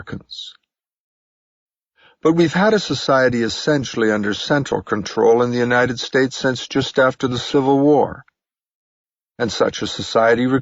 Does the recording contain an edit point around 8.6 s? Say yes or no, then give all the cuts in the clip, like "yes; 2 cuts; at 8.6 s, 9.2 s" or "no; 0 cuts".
no; 0 cuts